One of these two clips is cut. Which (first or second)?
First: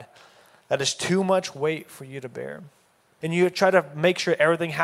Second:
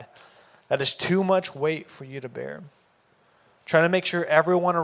first